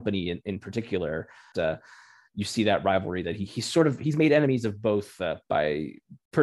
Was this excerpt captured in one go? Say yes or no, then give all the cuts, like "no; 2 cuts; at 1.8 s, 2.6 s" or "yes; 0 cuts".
no; 2 cuts; at 1.5 s, 5.4 s